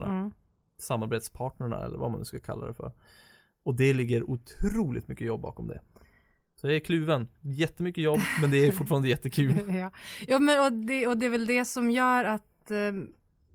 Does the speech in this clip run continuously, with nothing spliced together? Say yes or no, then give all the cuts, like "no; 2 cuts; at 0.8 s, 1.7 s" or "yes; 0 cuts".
yes; 0 cuts